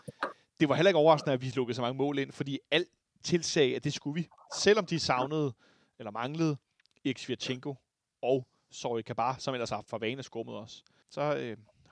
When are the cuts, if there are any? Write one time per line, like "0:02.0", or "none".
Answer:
0:11.0